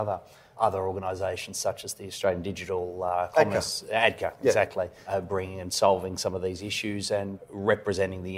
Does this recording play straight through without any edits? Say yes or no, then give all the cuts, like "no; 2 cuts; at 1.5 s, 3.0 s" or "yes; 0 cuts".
yes; 0 cuts